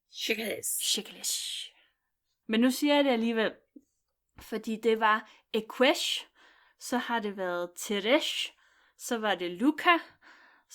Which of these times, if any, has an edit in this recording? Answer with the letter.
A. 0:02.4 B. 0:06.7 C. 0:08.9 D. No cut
A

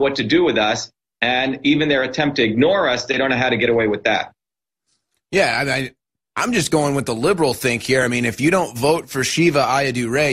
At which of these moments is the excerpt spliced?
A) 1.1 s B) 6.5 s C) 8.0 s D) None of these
D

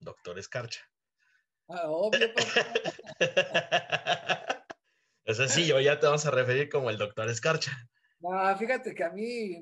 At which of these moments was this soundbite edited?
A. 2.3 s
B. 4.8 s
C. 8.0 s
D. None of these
D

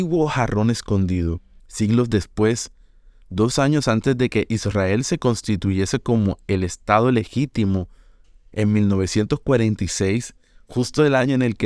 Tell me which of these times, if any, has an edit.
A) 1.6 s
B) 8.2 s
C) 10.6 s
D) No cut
A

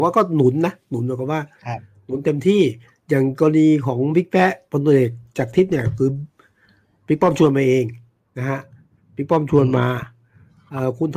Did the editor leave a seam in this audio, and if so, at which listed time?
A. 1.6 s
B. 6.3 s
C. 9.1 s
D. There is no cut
D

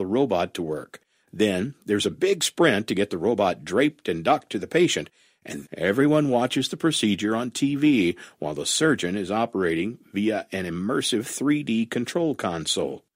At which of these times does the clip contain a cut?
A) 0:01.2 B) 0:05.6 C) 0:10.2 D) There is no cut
B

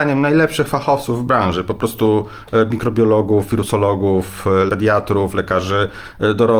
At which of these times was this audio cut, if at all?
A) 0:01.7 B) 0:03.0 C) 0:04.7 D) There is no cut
C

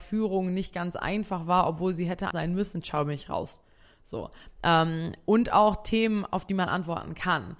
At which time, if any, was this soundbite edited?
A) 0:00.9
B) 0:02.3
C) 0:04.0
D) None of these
B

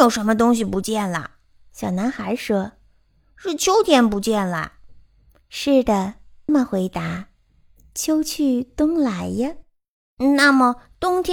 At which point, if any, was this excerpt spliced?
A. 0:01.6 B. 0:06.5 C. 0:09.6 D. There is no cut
B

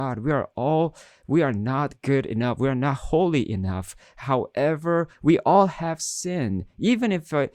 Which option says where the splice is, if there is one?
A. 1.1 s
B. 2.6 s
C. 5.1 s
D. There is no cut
C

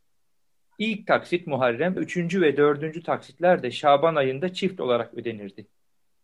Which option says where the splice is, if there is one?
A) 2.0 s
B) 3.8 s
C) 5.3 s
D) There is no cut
A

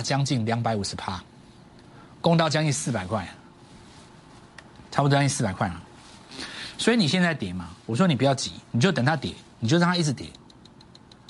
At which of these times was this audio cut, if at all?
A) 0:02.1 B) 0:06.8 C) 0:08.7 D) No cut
C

